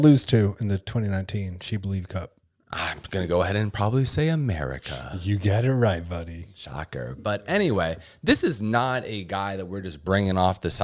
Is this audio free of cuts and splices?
yes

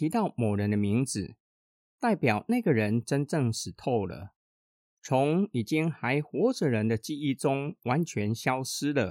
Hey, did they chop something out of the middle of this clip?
no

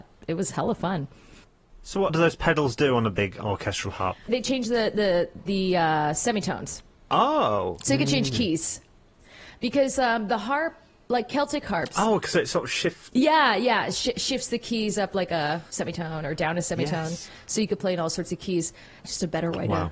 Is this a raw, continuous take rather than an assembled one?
no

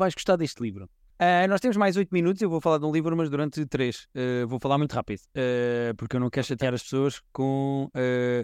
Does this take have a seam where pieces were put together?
yes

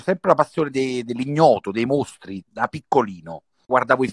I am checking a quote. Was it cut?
yes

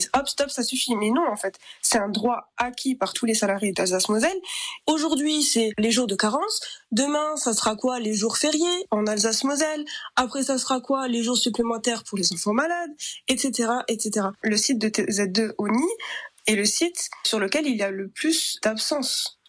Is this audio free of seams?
yes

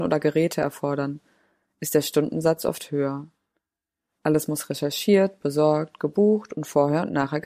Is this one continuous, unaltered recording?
yes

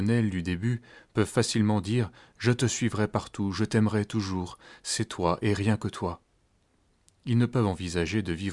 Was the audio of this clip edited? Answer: no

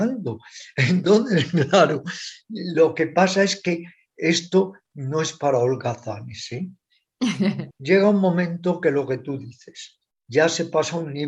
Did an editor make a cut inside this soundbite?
no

